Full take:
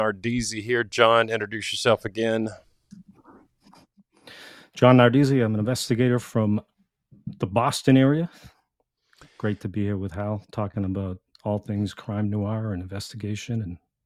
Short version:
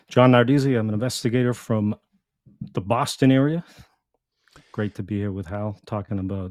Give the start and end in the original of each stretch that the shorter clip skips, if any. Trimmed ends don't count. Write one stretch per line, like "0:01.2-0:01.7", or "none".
none